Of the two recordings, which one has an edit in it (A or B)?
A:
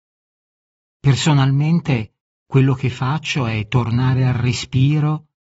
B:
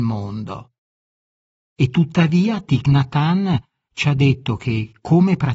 B